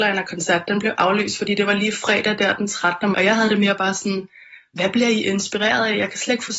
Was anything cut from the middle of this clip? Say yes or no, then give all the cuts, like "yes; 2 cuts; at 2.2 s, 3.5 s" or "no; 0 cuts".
yes; 1 cut; at 3.1 s